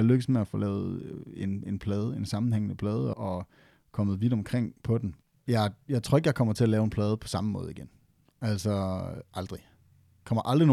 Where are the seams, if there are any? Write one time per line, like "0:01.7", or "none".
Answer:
0:03.1